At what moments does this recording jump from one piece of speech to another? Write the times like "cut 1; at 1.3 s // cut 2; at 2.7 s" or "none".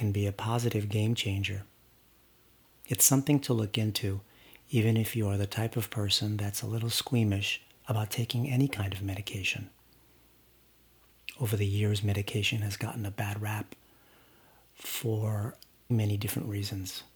cut 1; at 15.9 s